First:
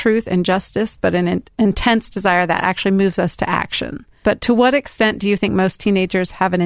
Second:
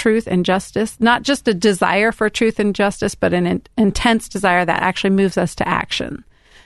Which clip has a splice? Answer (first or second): first